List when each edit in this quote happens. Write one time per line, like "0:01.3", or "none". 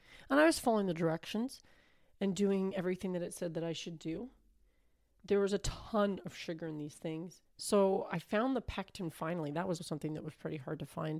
0:07.4
0:09.8